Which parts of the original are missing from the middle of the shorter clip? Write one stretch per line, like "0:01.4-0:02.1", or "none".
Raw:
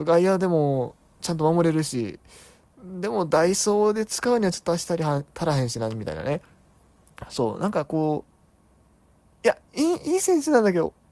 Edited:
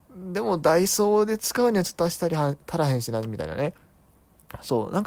none